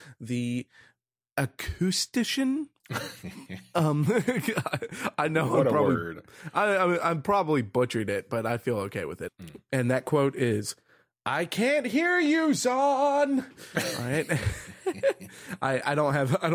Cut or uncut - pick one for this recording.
cut